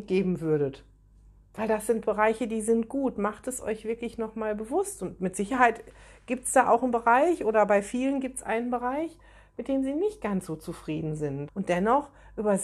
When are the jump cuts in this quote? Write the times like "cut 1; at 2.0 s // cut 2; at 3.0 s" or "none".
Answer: cut 1; at 11.5 s